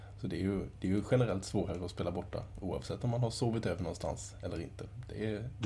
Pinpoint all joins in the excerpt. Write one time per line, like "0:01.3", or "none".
none